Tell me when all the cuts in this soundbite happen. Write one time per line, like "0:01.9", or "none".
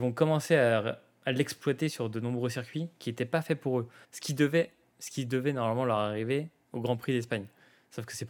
0:04.0